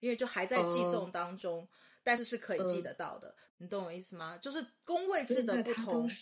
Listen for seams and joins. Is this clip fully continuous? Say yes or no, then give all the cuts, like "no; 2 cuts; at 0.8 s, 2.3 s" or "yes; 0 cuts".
no; 2 cuts; at 2.2 s, 3.5 s